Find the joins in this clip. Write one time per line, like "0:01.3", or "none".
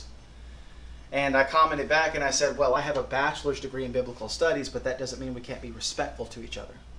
none